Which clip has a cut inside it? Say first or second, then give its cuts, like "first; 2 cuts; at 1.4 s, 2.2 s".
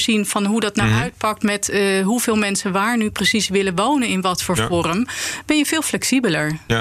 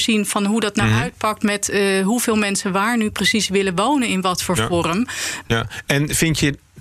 second; 1 cut; at 5.4 s